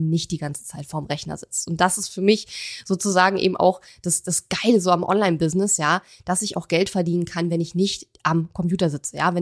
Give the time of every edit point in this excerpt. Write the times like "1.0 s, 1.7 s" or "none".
none